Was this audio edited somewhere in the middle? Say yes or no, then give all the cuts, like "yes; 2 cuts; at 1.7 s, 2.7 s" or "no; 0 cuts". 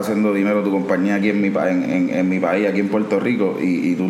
yes; 1 cut; at 1.8 s